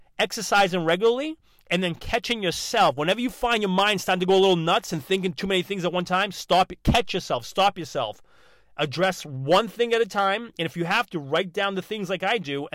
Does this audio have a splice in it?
no; 0 cuts

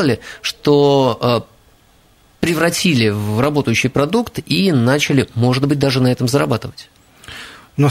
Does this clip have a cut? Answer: no; 0 cuts

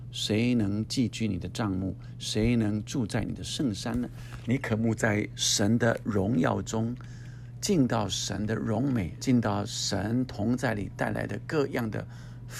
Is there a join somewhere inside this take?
yes; 2 cuts; at 4.5 s, 9.2 s

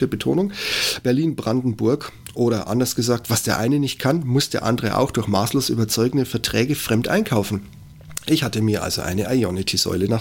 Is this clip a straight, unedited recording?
yes; 0 cuts

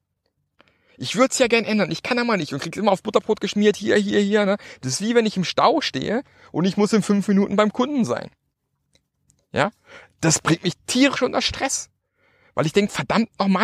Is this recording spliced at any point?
no; 0 cuts

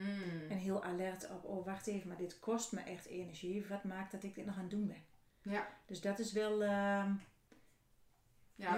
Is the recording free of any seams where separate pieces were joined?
yes; 0 cuts

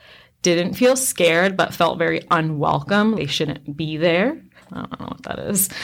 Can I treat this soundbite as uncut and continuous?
no; 2 cuts; at 3.1 s, 4.6 s

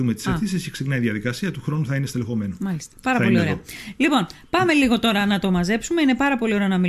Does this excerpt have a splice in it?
no; 0 cuts

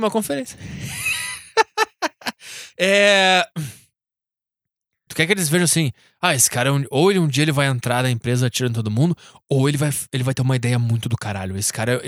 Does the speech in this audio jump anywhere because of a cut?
yes; 1 cut; at 5.1 s

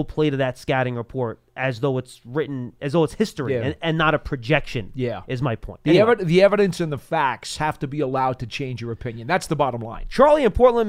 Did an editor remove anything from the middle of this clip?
yes; 1 cut; at 1.5 s

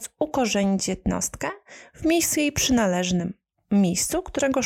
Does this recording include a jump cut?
no; 0 cuts

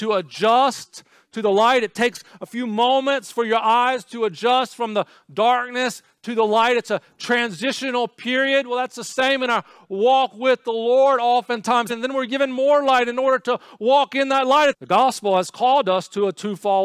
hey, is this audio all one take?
no; 2 cuts; at 11.9 s, 14.7 s

